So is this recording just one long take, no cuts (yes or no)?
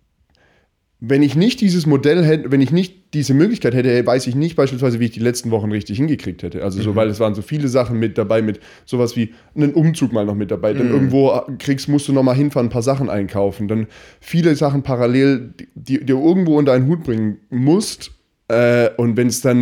yes